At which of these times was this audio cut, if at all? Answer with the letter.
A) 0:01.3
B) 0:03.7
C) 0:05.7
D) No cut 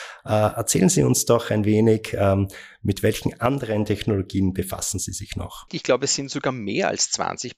C